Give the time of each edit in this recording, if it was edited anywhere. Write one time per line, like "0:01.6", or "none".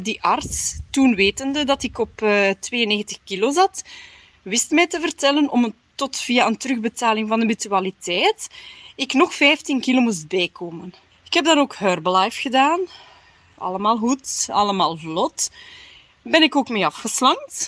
0:11.1